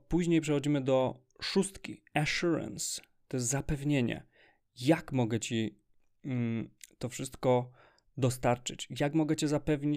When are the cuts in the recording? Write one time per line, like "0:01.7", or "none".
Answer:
none